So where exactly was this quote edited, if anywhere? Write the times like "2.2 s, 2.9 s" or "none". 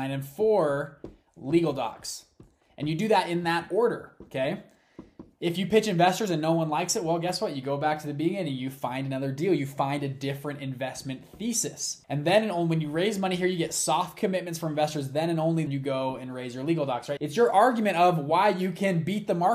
15.7 s, 17.2 s